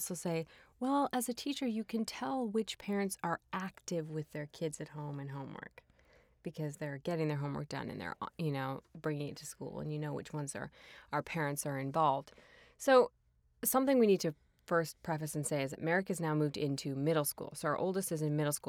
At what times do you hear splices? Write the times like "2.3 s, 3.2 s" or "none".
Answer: none